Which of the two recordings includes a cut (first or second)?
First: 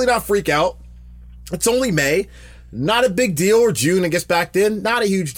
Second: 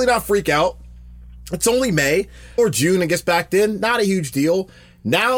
second